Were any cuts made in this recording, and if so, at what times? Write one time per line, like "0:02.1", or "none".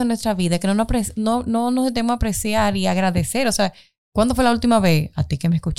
none